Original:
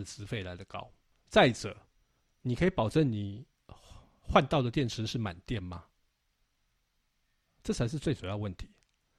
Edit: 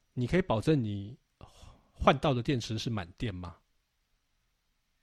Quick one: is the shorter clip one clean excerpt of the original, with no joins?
yes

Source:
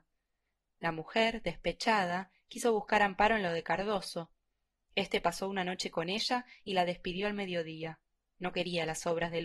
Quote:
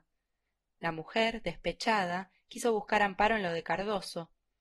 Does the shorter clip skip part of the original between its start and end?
no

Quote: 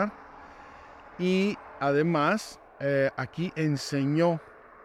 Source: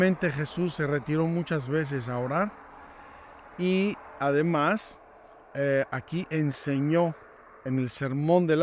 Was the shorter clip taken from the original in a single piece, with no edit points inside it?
no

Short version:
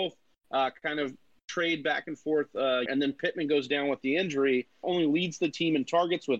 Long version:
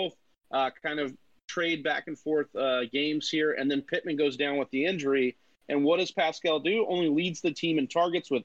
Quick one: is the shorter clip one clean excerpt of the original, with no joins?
no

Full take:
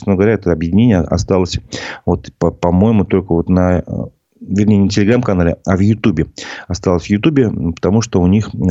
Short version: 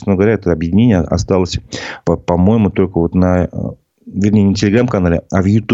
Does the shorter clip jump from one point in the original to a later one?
yes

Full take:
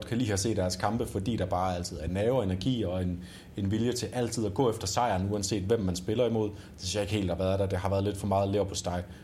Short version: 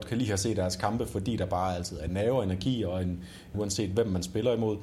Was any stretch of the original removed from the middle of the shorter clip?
yes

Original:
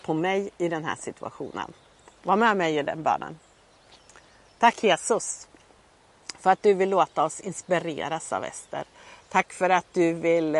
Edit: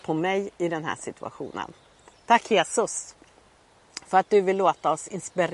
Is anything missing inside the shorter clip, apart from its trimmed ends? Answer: yes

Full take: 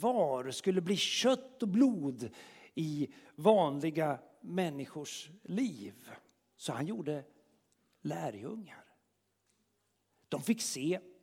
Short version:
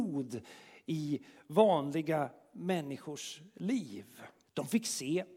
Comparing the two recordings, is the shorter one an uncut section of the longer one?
no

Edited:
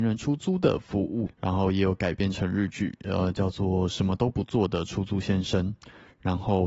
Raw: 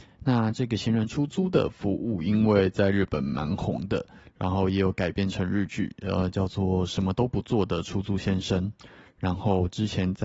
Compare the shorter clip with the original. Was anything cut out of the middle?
yes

